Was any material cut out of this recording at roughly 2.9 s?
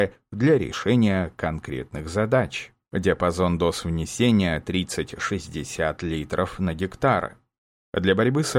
yes; 1 cut; at 2.9 s

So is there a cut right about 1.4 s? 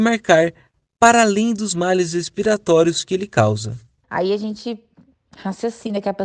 no; 1 cut; at 4.0 s

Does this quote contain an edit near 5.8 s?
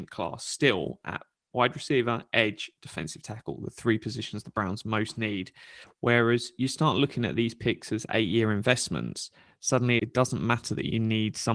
yes; 2 cuts; at 5.8 s, 10.0 s

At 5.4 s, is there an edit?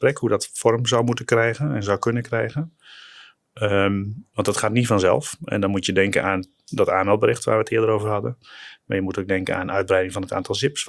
no; 0 cuts

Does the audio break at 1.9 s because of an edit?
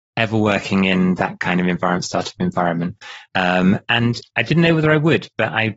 no; 1 cut; at 3.3 s

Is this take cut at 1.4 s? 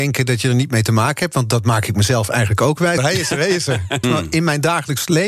no; 2 cuts; at 3.0 s, 4.0 s

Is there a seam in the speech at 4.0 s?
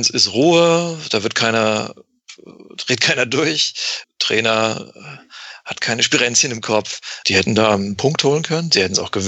yes; 2 cuts; at 4.0 s, 7.2 s

